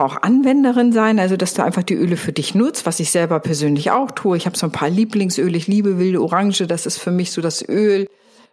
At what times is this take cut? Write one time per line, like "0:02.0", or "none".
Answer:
none